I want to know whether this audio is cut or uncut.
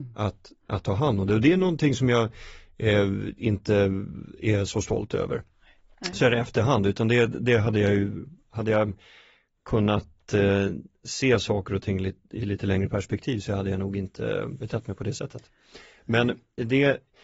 uncut